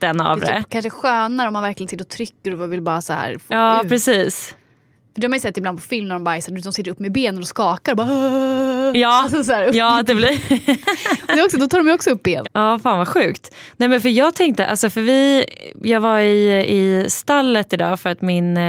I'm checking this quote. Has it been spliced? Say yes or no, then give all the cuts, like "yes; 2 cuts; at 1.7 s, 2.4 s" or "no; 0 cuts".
yes; 1 cut; at 12.4 s